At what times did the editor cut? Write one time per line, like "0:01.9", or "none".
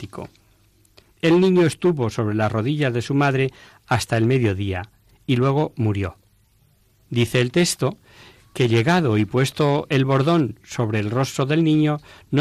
0:01.0
0:07.1